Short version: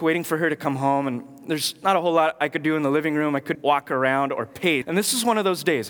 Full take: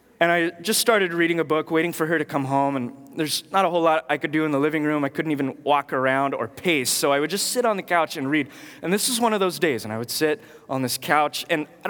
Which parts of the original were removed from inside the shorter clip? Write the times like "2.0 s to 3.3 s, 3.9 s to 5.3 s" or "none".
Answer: 5.2 s to 5.6 s, 6.8 s to 8.8 s